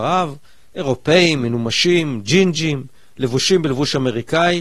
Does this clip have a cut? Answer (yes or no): no